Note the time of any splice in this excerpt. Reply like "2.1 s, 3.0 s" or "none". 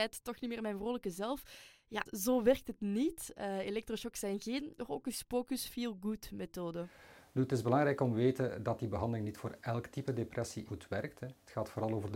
2.1 s, 10.7 s